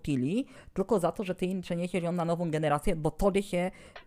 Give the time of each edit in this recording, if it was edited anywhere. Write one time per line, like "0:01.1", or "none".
none